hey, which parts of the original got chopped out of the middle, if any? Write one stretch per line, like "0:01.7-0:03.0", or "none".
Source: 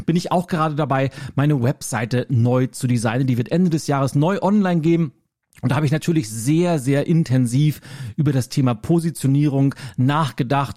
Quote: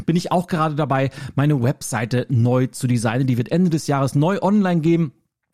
none